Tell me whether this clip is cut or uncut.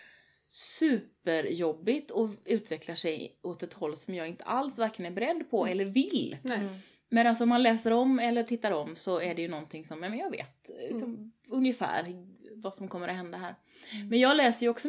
uncut